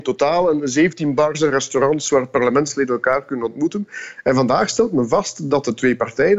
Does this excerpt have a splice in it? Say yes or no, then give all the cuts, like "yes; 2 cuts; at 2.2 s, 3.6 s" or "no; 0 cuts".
no; 0 cuts